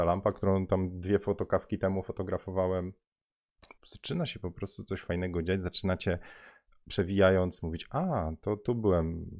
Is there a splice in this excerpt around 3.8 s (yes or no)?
yes